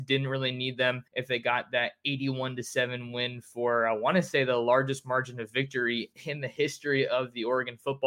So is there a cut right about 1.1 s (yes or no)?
yes